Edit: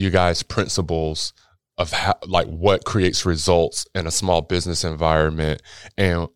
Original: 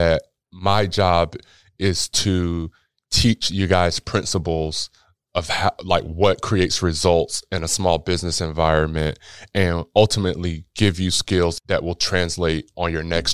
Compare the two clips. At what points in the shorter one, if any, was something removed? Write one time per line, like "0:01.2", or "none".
none